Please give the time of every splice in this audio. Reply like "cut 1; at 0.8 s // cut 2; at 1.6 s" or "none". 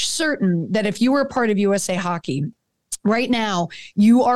none